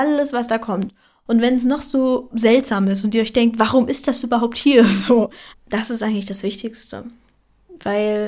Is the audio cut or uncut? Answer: cut